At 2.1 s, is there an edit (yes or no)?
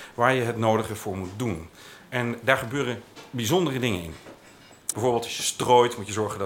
no